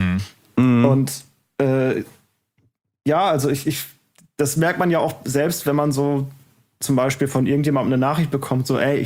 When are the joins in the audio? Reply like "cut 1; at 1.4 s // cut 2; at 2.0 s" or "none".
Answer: none